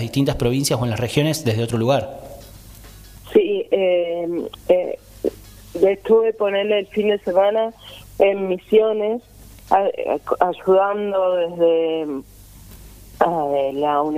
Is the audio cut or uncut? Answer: uncut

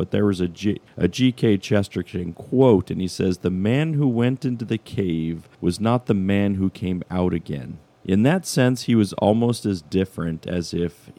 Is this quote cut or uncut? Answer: uncut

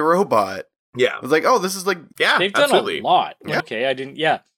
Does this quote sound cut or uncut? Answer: cut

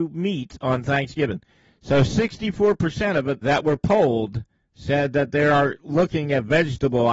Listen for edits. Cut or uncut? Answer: cut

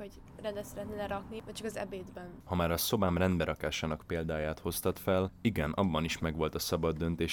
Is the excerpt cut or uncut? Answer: uncut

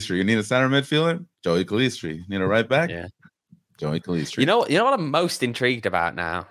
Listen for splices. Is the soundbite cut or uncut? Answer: uncut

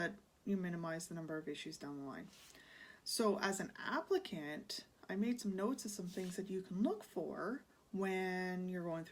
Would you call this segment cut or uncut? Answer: uncut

